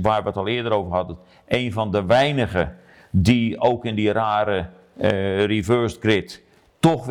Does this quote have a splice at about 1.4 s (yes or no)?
no